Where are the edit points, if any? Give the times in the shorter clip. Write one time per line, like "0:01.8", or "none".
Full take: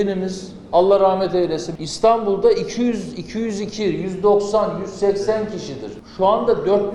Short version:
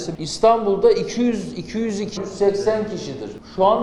0:02.2

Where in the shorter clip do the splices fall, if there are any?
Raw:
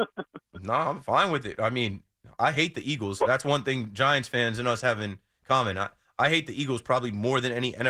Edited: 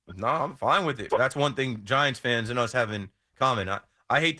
0:01.1

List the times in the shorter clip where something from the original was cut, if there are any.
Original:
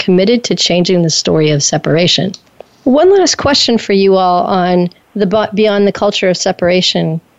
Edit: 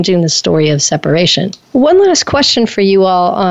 0:01.6

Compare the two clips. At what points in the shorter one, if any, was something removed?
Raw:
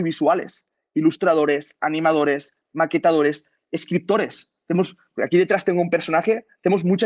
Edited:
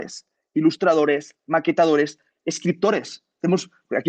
0:01.4

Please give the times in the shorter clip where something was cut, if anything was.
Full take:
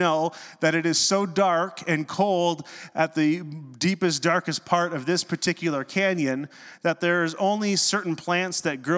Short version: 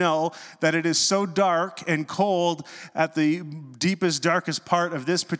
none

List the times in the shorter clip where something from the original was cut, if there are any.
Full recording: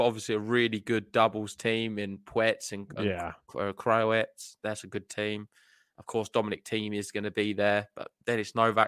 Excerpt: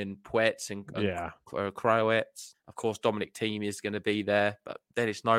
0:02.5

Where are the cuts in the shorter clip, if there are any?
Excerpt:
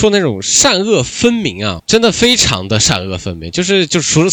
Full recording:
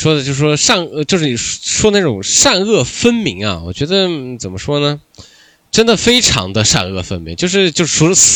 0:01.8

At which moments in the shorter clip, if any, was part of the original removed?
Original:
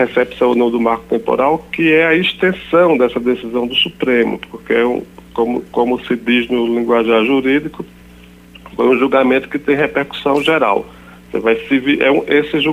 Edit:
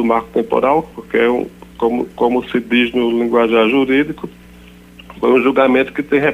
0:00.9

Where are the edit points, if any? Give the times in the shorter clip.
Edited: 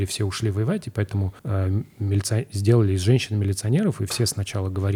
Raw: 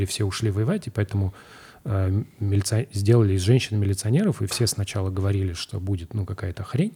0:01.4

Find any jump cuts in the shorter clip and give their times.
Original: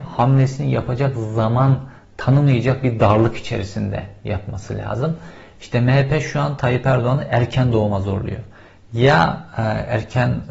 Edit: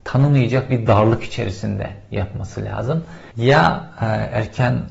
0:03.3

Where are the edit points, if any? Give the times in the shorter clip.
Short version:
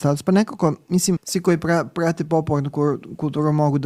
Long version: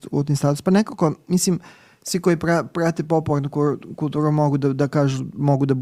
0:01.2

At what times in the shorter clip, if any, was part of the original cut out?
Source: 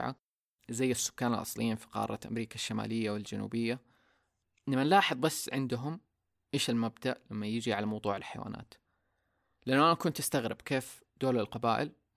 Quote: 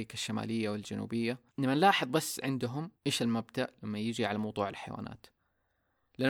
0:01.5
0:03.0

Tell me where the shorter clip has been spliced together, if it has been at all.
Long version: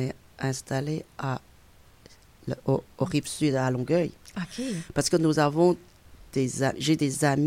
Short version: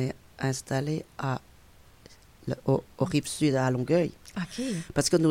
none

